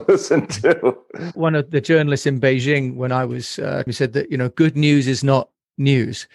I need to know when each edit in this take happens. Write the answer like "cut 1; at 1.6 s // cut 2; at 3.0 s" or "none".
cut 1; at 3.9 s